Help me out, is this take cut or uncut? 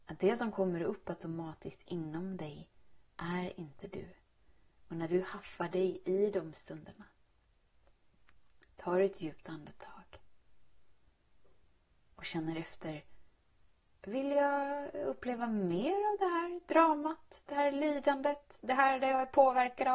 uncut